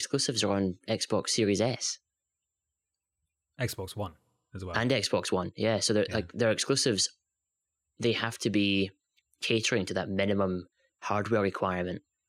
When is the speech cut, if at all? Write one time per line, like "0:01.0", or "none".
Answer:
none